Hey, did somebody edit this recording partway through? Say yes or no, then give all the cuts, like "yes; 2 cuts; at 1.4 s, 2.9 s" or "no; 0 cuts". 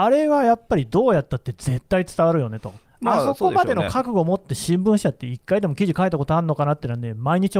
no; 0 cuts